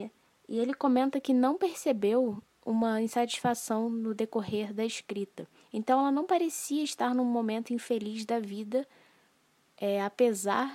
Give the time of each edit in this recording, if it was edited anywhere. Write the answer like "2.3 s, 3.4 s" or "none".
none